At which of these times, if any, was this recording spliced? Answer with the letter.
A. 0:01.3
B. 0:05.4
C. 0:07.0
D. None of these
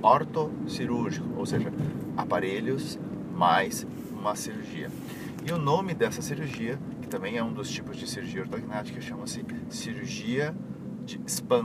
D